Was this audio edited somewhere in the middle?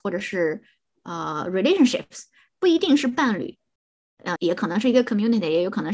yes; 1 cut; at 4.4 s

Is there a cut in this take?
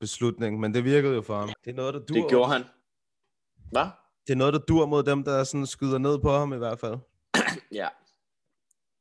yes; 1 cut; at 1.5 s

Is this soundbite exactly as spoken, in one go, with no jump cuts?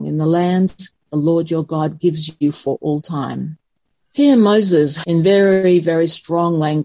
yes; 0 cuts

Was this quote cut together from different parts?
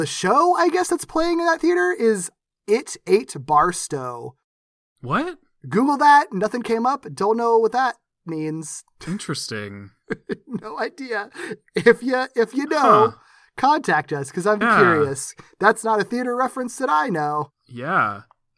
yes; 1 cut; at 14.6 s

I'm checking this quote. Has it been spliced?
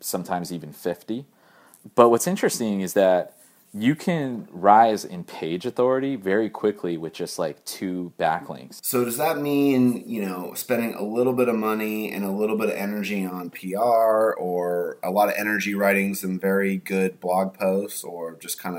yes; 1 cut; at 8.8 s

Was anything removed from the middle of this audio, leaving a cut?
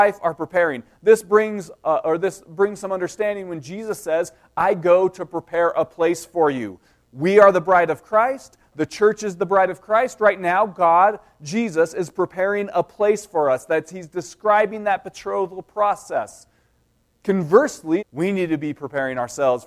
yes; 1 cut; at 18.0 s

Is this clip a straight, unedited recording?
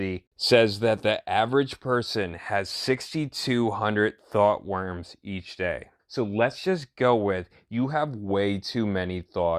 no; 1 cut; at 6.0 s

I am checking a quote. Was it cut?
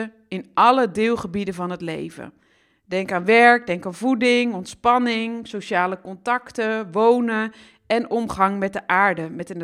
no; 0 cuts

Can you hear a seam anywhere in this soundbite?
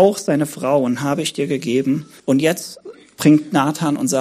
yes; 1 cut; at 2.2 s

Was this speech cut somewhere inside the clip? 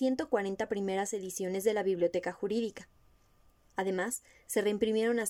no; 0 cuts

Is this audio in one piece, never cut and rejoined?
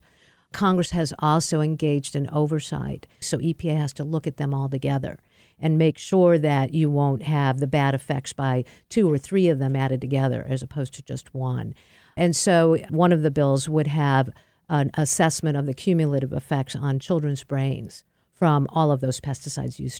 no; 1 cut; at 3.2 s

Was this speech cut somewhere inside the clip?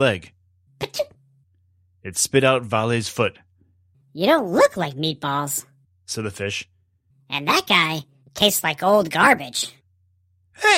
yes; 1 cut; at 4.0 s

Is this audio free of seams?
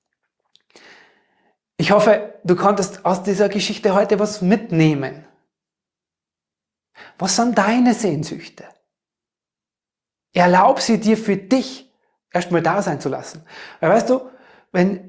yes; 0 cuts

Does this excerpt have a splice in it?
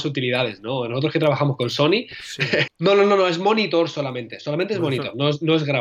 yes; 1 cut; at 2.7 s

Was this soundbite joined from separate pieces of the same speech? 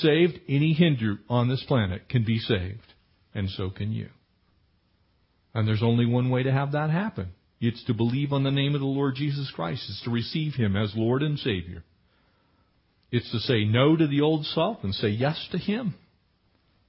no; 0 cuts

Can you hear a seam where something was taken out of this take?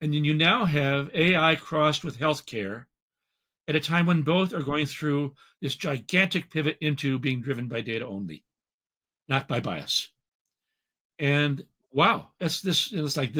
no; 0 cuts

